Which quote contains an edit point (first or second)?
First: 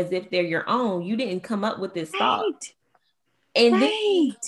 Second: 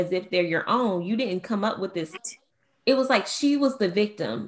second